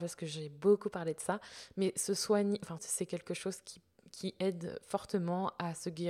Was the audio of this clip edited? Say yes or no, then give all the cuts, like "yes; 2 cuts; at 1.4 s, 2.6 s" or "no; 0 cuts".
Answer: yes; 1 cut; at 2.8 s